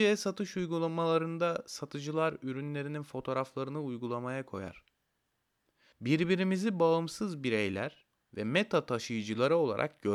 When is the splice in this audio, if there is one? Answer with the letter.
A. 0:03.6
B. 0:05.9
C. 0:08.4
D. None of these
B